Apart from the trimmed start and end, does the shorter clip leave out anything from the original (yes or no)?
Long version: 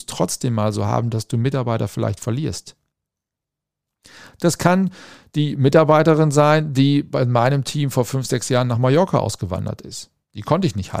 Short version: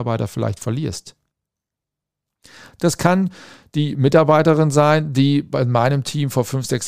no